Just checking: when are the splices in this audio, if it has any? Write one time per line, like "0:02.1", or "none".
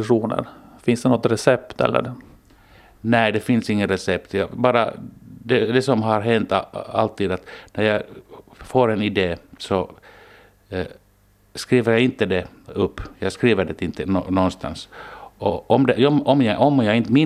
none